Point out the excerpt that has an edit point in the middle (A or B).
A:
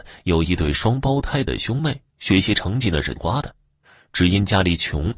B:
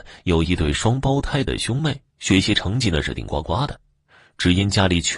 A